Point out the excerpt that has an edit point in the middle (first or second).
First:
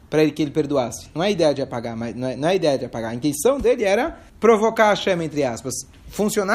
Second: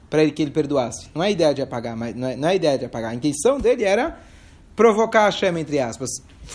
first